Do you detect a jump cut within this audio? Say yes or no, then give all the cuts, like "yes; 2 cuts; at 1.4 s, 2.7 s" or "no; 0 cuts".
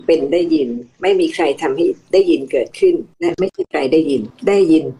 yes; 1 cut; at 3.1 s